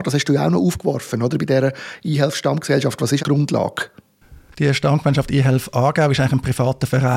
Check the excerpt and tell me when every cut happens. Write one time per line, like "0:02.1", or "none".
0:03.2